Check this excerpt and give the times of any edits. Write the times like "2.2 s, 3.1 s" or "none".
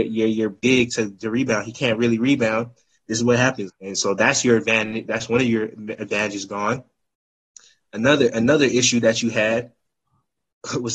3.7 s